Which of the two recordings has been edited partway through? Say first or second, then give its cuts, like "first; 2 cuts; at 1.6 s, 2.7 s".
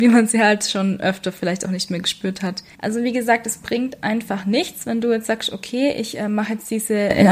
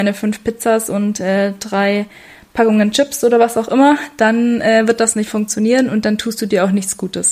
first; 1 cut; at 2.7 s